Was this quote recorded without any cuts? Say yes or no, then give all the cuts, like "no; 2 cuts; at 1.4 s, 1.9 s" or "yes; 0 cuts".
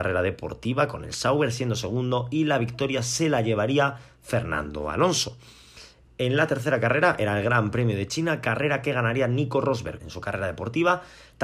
no; 2 cuts; at 6.1 s, 10.0 s